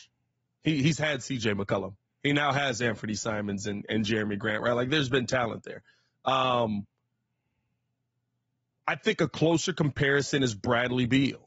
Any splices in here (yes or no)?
no